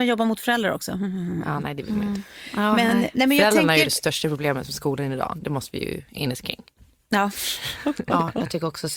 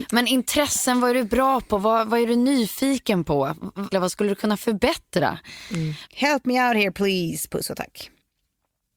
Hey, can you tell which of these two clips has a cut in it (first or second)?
second